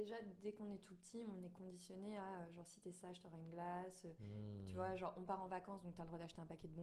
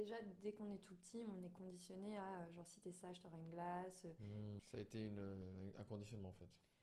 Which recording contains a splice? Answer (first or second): second